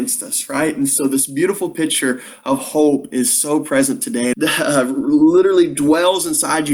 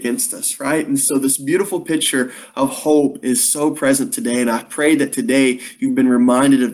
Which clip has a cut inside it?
first; 1 cut; at 4.3 s

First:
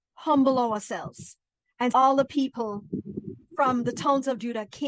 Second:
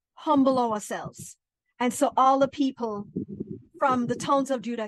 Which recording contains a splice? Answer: first; 1 cut; at 1.9 s

